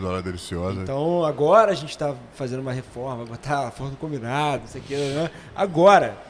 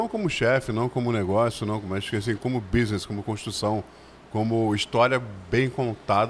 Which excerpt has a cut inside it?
second; 1 cut; at 2.4 s

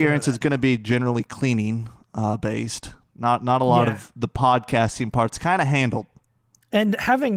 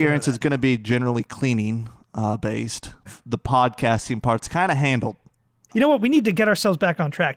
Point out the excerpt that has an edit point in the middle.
second; 2 cuts; at 3.1 s, 5.7 s

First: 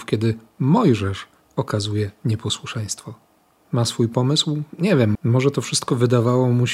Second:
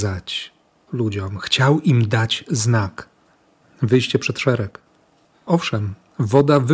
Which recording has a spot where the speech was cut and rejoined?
first; 1 cut; at 5.2 s

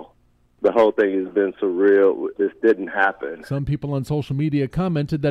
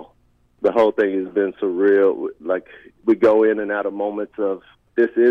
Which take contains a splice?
first; 1 cut; at 2.4 s

